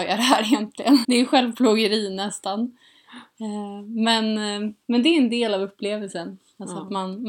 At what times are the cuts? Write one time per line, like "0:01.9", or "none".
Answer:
0:01.0